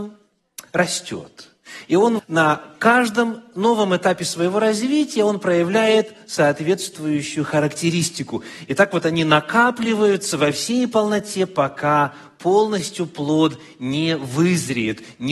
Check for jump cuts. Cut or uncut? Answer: cut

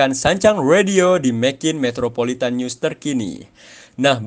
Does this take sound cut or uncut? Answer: uncut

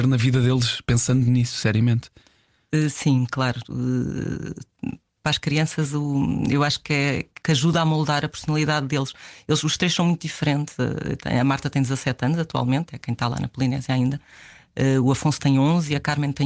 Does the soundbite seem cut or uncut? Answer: cut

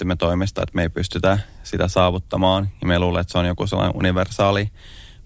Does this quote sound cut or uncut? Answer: uncut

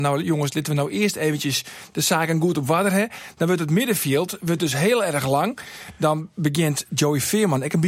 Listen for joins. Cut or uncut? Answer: uncut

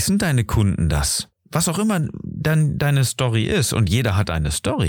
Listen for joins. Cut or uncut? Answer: uncut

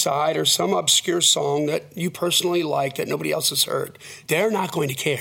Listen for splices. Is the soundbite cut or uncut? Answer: uncut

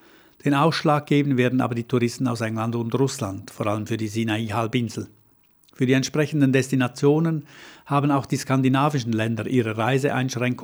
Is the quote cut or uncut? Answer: uncut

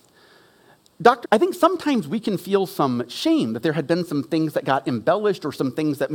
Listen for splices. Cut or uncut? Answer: cut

